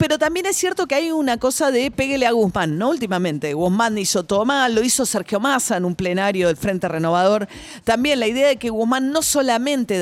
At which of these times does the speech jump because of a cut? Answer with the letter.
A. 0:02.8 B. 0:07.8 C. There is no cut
C